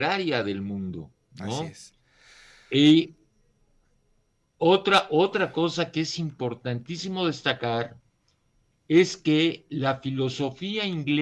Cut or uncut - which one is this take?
uncut